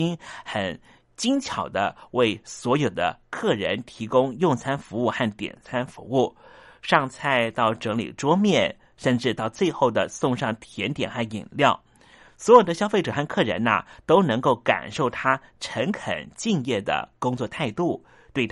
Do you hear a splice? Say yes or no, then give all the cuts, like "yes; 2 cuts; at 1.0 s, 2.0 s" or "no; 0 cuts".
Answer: no; 0 cuts